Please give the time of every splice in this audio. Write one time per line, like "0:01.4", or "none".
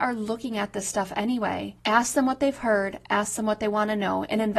none